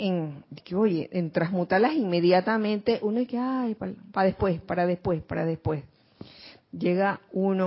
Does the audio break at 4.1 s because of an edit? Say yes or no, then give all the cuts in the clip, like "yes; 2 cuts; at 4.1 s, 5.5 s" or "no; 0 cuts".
no; 0 cuts